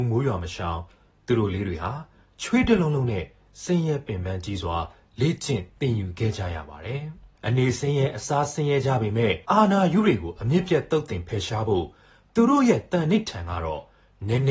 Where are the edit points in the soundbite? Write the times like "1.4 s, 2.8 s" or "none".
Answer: 7.3 s, 9.4 s